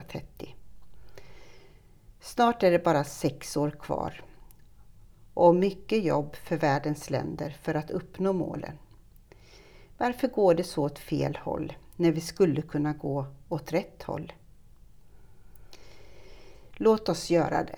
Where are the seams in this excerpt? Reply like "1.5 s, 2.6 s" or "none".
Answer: 16.7 s